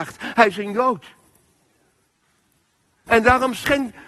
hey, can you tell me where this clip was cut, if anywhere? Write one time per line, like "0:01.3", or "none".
0:03.1

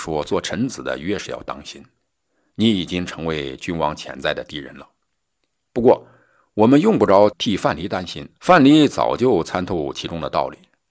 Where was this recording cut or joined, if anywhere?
0:08.4

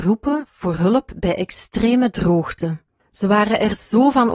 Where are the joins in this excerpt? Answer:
0:03.0

